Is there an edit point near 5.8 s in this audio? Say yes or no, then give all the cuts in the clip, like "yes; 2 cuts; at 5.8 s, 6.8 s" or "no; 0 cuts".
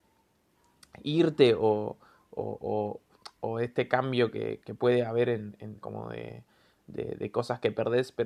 yes; 2 cuts; at 4.6 s, 5.8 s